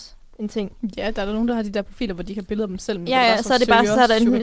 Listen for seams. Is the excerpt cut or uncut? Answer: uncut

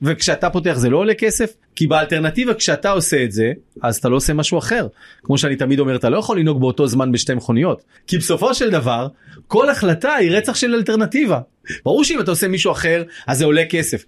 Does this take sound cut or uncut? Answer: cut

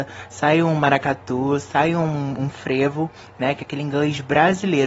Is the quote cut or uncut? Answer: uncut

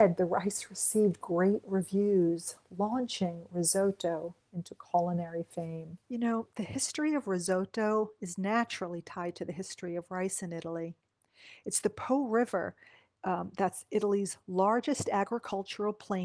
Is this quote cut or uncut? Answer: cut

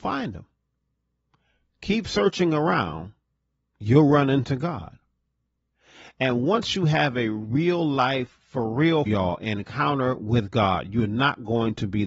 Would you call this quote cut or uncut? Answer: cut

